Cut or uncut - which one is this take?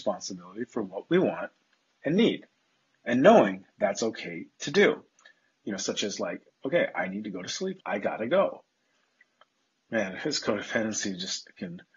cut